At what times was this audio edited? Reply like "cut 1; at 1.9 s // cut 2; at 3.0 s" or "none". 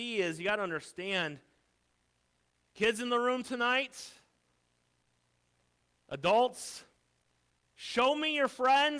none